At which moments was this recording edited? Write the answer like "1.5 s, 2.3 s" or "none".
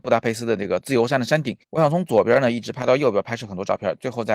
1.6 s